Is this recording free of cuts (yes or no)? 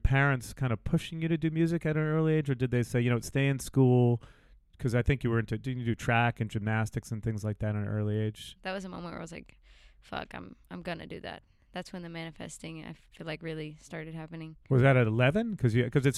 no